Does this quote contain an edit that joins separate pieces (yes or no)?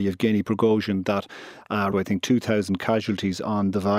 yes